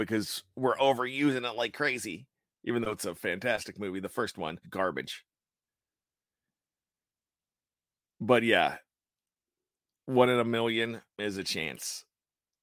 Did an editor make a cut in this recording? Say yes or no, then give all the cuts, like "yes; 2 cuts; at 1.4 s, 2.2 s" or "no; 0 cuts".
yes; 2 cuts; at 4.6 s, 11.1 s